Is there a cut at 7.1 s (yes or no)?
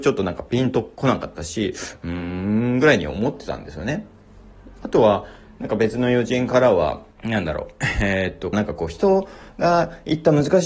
yes